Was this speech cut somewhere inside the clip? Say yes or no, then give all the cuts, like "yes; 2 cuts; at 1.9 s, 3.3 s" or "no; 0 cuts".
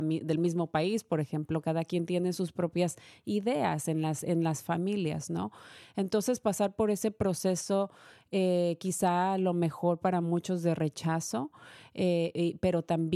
no; 0 cuts